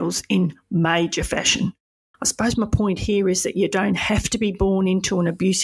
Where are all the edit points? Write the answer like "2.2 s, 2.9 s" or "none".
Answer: 2.1 s